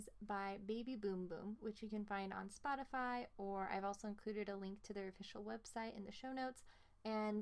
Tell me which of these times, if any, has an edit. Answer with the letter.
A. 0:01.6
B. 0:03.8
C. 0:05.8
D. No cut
D